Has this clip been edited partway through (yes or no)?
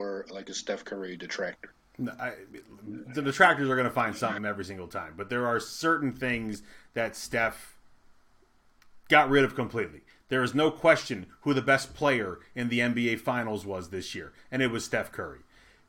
no